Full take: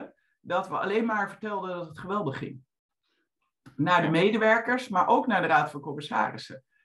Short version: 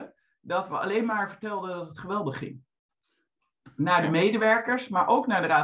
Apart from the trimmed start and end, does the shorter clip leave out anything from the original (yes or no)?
no